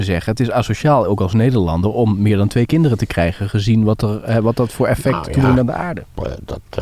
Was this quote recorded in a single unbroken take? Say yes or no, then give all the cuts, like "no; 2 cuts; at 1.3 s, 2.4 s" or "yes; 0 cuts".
yes; 0 cuts